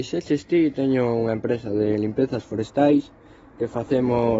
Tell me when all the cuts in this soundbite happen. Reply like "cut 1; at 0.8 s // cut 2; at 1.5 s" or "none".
none